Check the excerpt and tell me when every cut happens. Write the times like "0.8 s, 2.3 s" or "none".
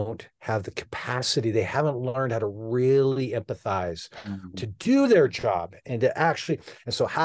4.5 s